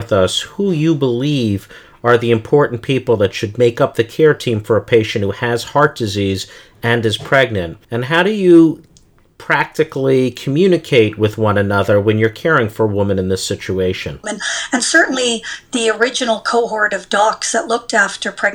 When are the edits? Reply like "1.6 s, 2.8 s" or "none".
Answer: 7.8 s, 14.2 s